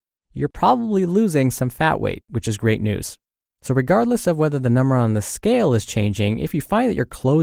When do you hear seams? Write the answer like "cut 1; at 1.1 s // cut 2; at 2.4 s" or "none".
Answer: none